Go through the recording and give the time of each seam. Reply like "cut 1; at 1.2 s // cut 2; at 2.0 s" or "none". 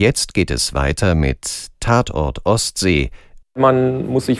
cut 1; at 3.4 s